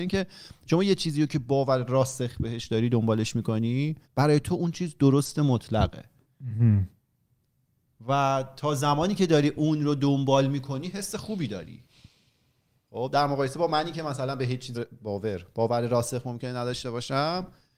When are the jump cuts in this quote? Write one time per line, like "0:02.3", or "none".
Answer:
0:04.0
0:14.7